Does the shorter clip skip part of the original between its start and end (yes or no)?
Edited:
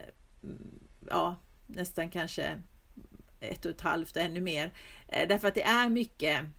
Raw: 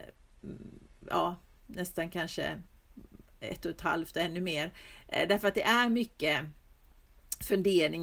no